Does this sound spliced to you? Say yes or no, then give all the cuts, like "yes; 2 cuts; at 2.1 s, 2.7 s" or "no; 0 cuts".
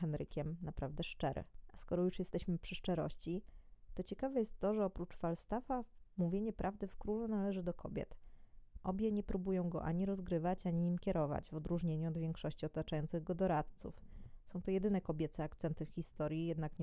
yes; 1 cut; at 8.8 s